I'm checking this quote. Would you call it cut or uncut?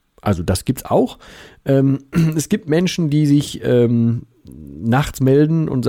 uncut